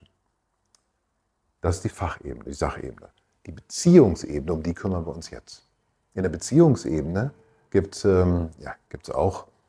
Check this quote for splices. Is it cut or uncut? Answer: uncut